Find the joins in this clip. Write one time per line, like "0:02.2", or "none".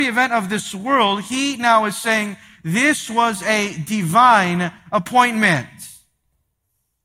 none